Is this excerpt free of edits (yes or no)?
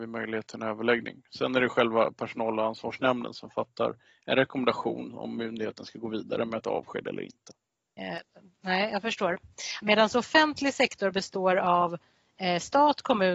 no